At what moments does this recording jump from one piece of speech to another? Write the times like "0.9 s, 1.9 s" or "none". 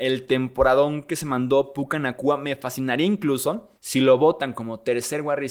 3.8 s